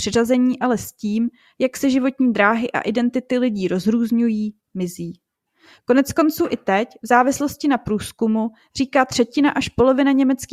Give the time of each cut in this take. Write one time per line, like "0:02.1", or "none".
none